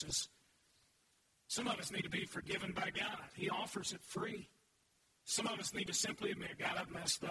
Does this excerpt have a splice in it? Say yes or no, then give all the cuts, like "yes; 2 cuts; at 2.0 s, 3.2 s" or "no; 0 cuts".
yes; 1 cut; at 1.5 s